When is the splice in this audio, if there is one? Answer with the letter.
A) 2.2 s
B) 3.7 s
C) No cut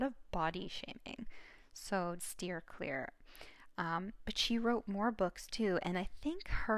A